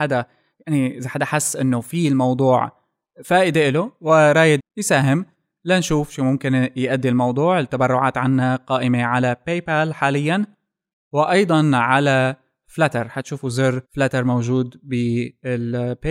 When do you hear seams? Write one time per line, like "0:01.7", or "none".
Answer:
0:04.6
0:13.8